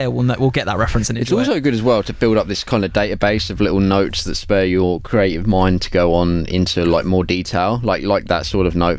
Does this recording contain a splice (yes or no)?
no